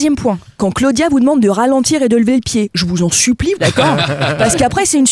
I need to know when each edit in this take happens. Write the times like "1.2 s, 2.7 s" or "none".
3.6 s